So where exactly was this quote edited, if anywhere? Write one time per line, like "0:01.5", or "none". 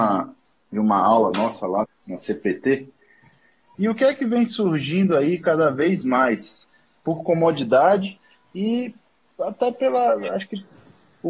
0:01.8
0:03.7

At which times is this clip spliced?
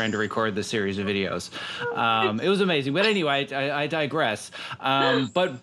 none

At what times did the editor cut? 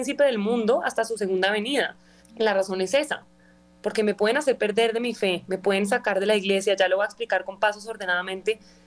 0:02.2

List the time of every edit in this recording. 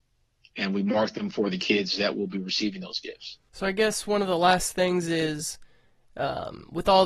none

